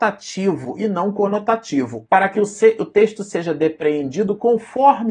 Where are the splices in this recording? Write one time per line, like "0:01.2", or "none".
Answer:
0:02.1